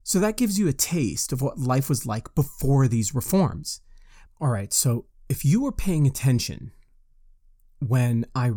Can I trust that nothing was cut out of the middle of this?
no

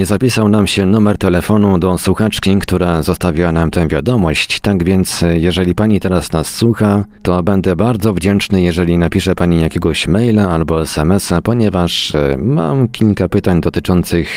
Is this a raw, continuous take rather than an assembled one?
yes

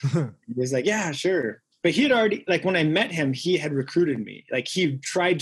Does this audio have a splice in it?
no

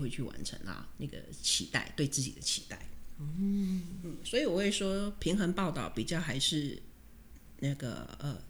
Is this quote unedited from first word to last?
no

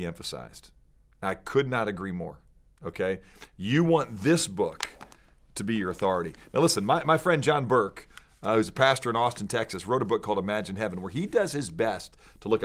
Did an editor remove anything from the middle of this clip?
no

